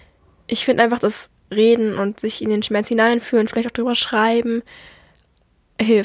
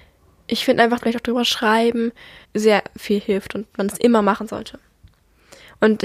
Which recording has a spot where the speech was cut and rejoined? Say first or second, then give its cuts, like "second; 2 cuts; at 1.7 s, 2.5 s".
second; 2 cuts; at 1.0 s, 2.4 s